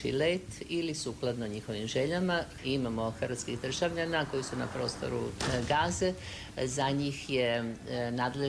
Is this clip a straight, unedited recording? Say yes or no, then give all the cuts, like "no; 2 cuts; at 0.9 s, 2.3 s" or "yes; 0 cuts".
no; 1 cut; at 2.6 s